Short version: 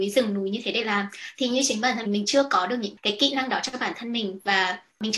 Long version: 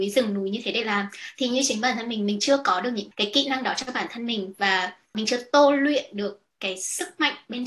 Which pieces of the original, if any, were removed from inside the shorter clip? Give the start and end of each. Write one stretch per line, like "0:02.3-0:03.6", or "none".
0:02.1-0:02.2